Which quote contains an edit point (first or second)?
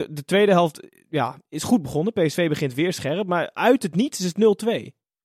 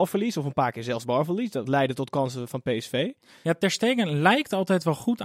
second